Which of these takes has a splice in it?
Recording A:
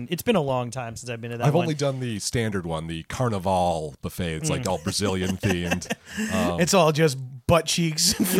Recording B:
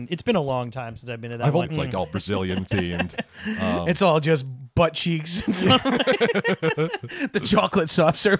B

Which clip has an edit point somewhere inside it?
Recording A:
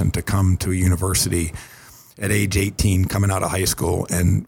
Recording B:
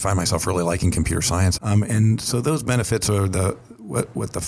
B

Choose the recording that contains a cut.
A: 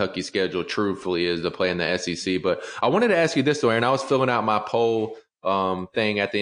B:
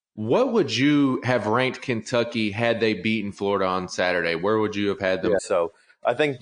B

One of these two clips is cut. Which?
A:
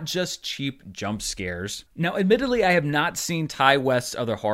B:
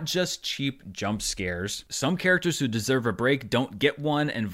A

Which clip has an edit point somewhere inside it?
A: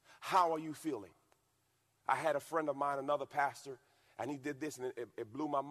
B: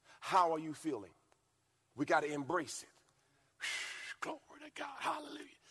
B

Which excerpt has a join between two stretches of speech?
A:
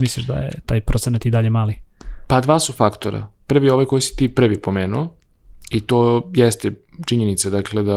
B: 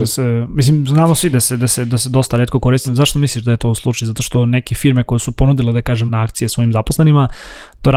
B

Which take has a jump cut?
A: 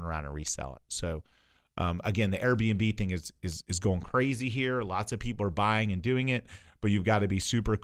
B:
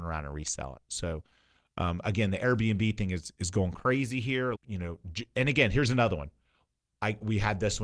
B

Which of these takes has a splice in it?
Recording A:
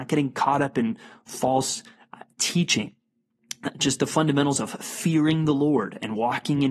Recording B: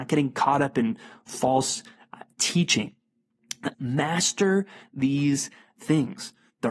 B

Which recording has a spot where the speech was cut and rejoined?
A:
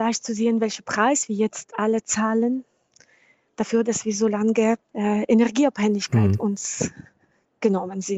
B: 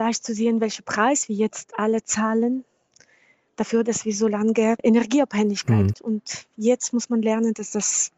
B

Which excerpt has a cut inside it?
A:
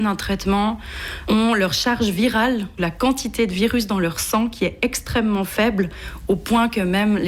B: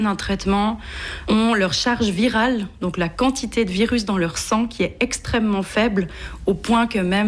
A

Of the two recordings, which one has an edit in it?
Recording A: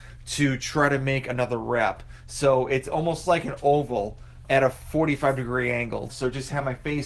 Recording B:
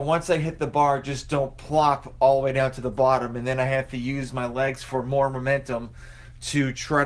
A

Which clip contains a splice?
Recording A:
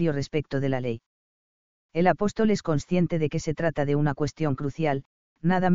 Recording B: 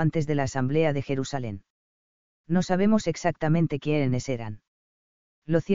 A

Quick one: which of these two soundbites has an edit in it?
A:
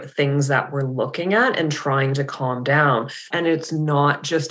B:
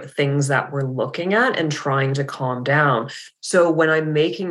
A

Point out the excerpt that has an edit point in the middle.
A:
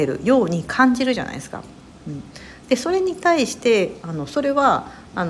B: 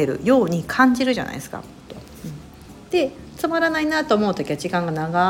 B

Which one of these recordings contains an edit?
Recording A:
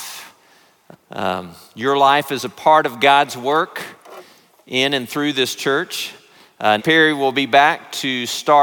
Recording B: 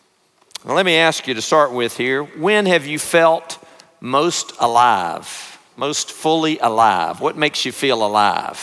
A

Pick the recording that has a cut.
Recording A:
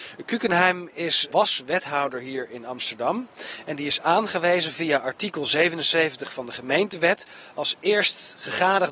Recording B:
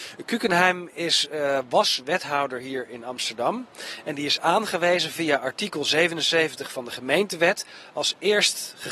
A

